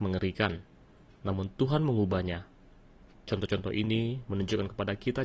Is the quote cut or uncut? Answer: cut